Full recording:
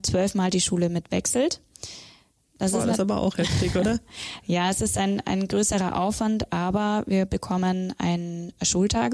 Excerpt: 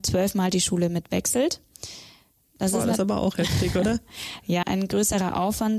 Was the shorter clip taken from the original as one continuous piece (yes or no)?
no